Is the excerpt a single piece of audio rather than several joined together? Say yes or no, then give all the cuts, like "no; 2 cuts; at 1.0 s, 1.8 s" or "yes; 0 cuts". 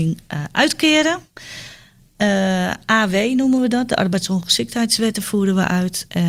yes; 0 cuts